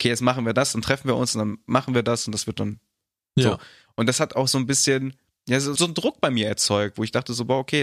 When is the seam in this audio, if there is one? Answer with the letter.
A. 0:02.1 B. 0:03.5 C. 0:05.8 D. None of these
C